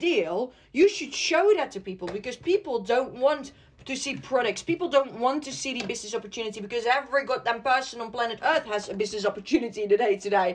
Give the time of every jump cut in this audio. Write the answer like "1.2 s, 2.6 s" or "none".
none